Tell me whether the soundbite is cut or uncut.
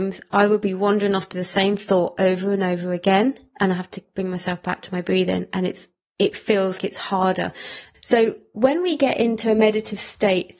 cut